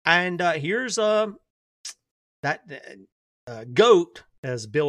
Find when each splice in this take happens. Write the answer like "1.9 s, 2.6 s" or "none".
none